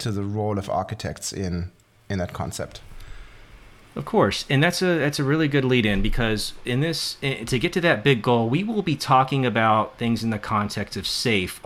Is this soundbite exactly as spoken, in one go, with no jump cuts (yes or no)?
yes